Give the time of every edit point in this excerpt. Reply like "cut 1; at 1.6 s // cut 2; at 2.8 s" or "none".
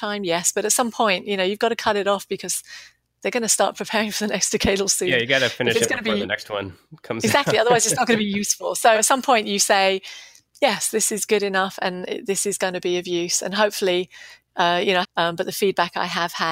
cut 1; at 8.9 s // cut 2; at 15.0 s